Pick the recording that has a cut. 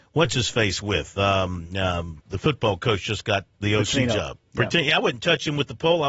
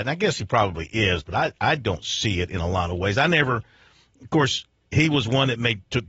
first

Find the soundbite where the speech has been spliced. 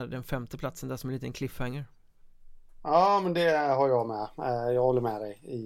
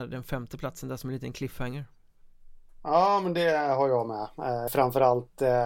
second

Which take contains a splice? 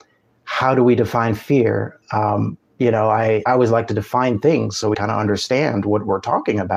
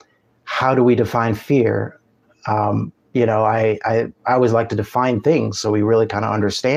first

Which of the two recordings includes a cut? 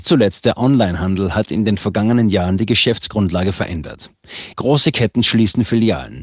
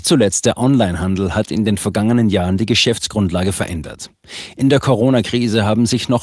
first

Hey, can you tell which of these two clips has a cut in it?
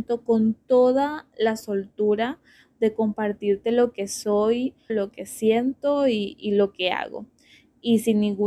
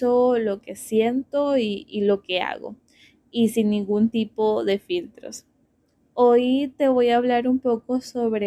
first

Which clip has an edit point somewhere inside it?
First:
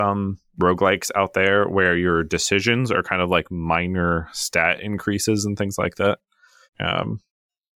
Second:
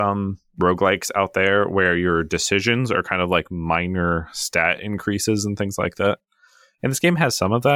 first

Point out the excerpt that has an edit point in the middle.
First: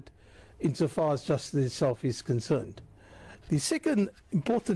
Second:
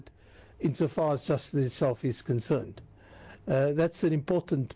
first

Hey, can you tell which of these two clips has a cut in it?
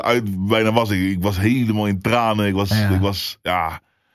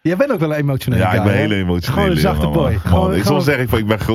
second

